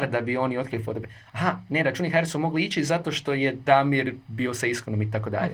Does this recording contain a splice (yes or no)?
no